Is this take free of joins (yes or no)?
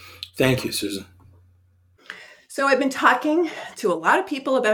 yes